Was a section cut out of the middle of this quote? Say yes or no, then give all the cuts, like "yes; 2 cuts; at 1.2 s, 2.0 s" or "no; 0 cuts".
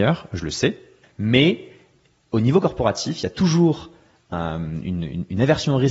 no; 0 cuts